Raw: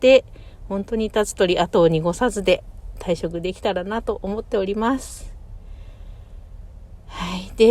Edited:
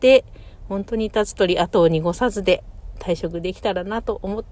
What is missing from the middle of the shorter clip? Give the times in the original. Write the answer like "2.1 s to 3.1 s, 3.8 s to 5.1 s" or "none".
none